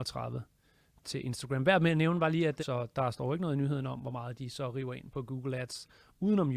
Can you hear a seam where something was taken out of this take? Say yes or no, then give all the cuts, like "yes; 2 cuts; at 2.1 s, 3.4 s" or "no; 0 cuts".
yes; 1 cut; at 2.6 s